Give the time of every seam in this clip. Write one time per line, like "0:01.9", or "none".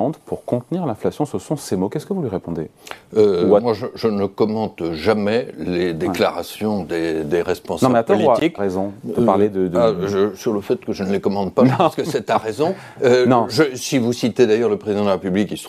0:08.6

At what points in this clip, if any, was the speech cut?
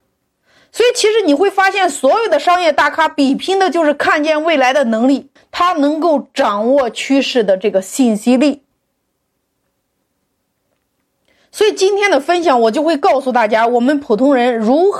0:05.4

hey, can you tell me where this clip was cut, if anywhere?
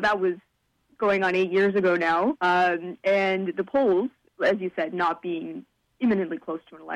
0:02.4
0:04.3

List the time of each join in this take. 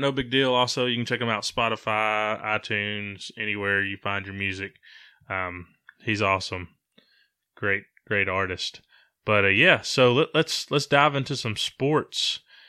none

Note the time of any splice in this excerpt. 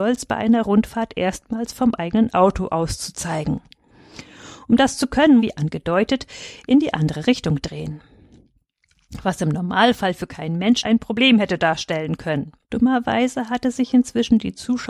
0:05.4
0:10.8
0:12.6

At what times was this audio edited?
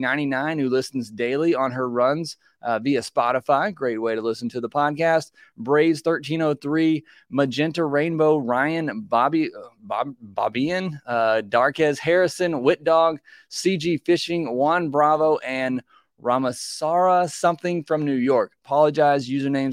none

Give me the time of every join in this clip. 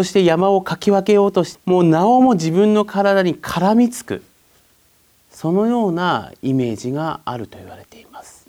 0:01.5

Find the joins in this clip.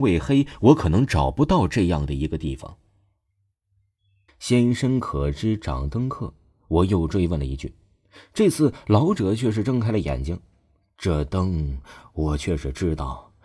0:04.3

